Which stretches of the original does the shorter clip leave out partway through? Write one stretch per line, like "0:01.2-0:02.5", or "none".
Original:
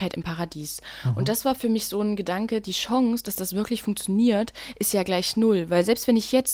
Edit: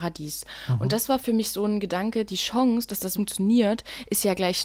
0:03.5-0:03.8